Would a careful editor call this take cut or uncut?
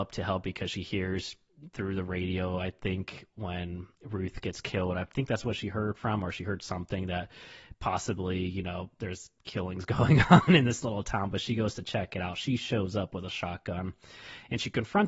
uncut